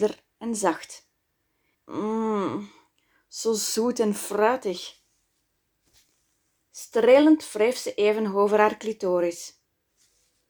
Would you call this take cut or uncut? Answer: cut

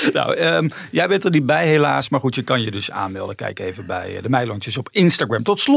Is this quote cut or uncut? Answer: uncut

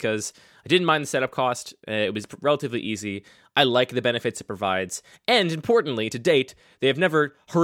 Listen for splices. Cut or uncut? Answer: uncut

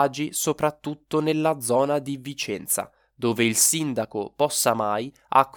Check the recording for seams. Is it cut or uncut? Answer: uncut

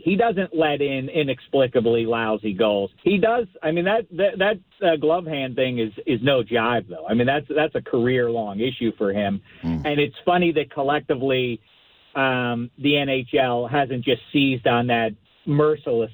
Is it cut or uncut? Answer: cut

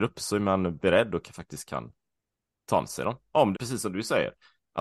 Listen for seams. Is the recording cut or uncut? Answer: cut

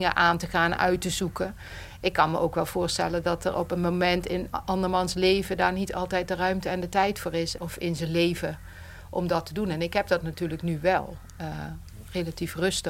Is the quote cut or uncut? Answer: cut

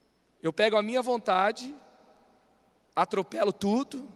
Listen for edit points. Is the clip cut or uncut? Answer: uncut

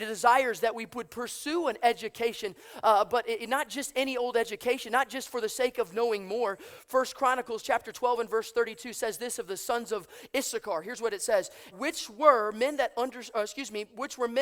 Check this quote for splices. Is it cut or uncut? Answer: cut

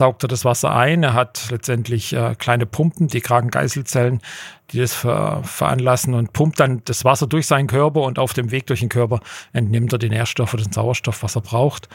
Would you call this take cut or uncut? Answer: uncut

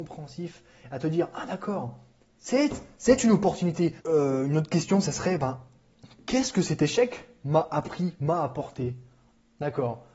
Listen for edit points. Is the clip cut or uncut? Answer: cut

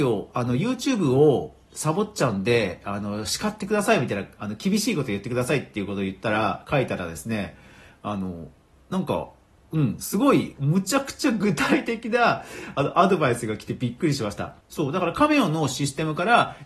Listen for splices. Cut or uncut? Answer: cut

